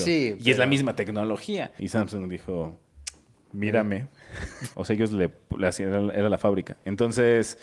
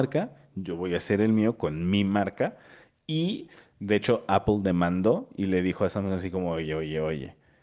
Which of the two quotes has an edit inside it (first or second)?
first